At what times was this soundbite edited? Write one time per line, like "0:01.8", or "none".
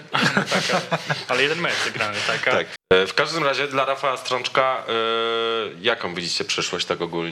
0:02.8